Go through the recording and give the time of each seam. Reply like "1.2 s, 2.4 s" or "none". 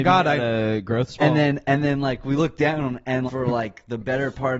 1.2 s, 3.3 s